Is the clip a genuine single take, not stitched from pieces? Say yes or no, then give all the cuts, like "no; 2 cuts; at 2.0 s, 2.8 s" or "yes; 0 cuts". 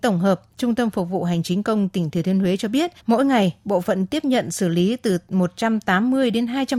no; 1 cut; at 3.0 s